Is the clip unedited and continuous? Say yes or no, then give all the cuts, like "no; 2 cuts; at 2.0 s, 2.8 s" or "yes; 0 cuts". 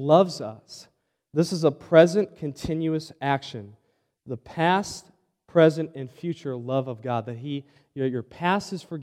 yes; 0 cuts